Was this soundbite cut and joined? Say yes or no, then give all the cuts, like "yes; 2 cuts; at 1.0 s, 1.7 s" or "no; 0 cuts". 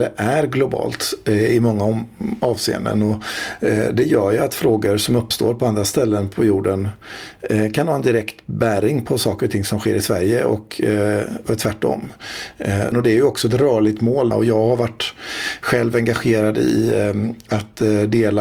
yes; 2 cuts; at 12.9 s, 14.3 s